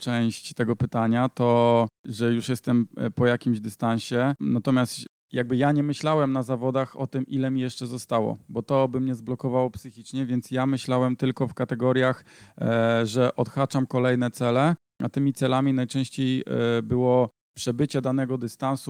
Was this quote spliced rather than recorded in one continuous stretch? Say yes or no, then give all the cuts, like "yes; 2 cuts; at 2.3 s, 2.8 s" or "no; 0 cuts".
no; 0 cuts